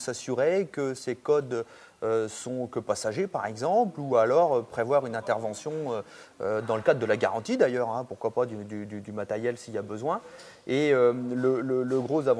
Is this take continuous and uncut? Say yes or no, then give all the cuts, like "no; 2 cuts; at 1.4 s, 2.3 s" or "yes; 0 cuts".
yes; 0 cuts